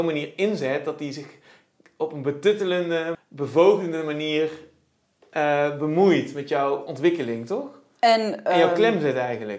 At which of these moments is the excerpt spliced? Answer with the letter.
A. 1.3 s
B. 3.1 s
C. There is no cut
B